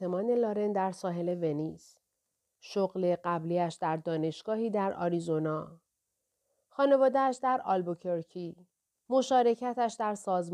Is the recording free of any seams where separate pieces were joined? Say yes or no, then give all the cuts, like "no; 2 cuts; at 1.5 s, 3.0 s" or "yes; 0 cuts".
no; 1 cut; at 8.9 s